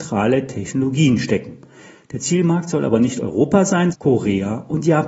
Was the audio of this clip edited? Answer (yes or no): yes